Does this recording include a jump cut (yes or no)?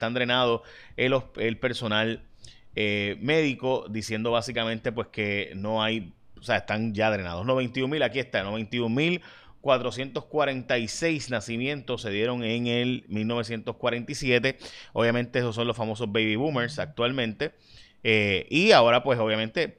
no